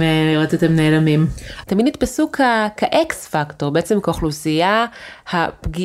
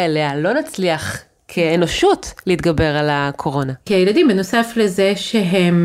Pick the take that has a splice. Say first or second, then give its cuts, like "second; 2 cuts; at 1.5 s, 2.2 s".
first; 1 cut; at 1.7 s